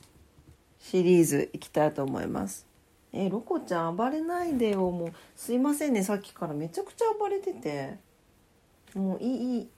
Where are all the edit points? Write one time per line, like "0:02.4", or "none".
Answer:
none